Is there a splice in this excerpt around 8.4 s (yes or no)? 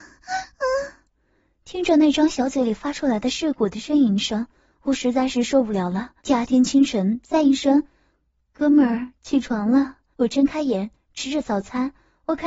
no